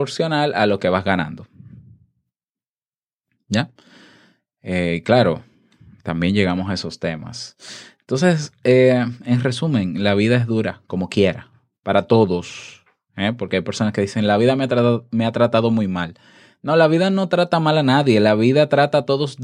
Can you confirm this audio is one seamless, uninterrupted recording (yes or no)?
yes